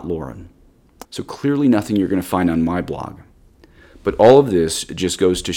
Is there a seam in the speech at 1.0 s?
yes; 1 cut; at 1.0 s

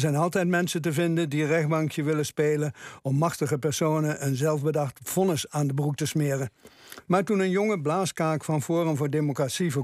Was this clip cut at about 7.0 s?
yes; 1 cut; at 7.0 s

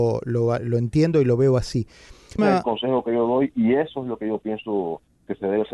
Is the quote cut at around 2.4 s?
yes; 1 cut; at 2.4 s

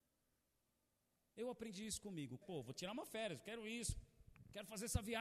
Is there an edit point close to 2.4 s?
yes; 1 cut; at 2.4 s

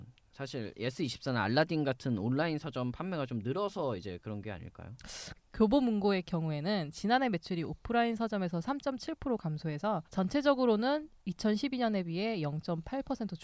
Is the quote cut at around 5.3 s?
yes; 2 cuts; at 5.3 s, 10.1 s

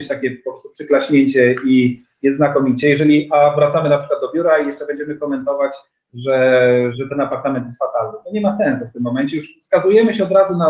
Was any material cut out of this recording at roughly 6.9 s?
yes; 1 cut; at 6.9 s

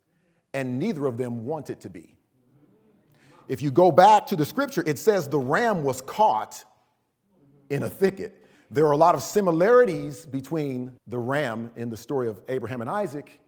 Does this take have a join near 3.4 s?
no; 2 cuts; at 8.5 s, 11.0 s

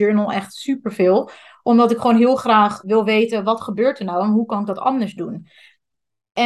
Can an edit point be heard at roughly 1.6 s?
no; 1 cut; at 2.8 s

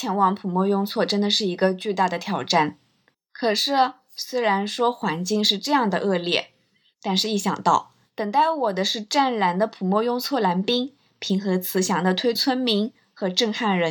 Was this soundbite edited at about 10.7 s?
no; 2 cuts; at 3.1 s, 12.4 s

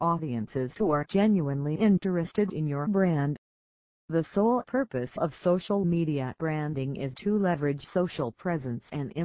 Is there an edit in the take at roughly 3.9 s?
yes; 1 cut; at 3.9 s

